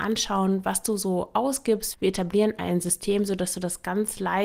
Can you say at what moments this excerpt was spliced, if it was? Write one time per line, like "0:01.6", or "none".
0:01.9